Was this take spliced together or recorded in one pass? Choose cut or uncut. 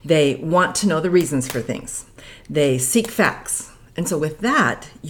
uncut